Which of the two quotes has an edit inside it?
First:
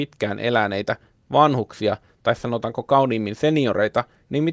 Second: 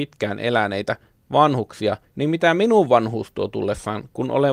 second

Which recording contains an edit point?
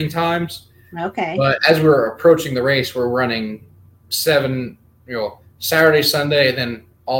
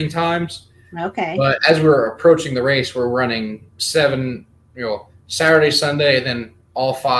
second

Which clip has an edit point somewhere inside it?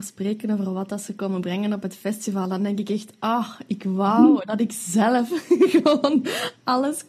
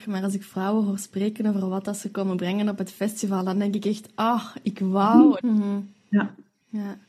second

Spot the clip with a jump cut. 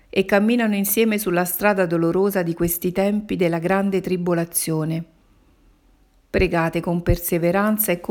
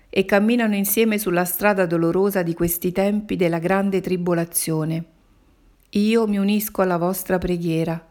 second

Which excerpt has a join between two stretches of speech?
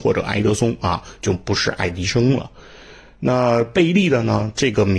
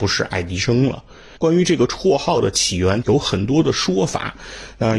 second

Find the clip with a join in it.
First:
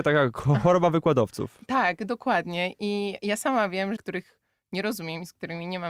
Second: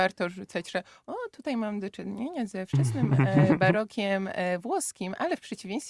first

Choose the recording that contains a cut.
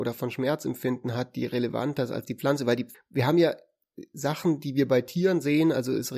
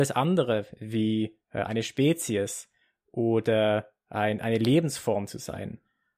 first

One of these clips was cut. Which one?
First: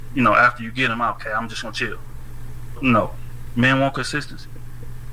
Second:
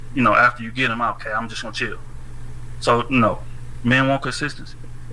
first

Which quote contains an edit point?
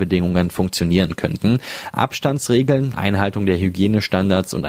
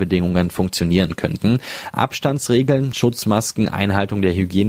first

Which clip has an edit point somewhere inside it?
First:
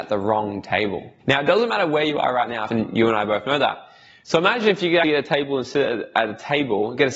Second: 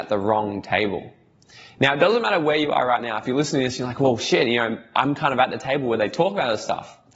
first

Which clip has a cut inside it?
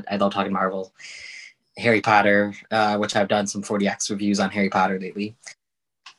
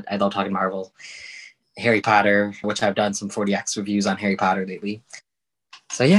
second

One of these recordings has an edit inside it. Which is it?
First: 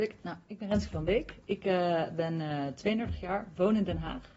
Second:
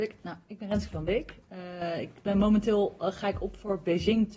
second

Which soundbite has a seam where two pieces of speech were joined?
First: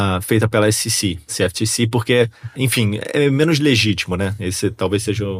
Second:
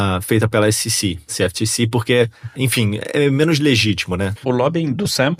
second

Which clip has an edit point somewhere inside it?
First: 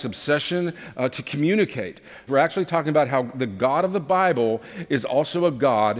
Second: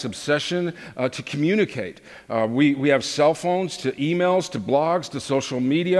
first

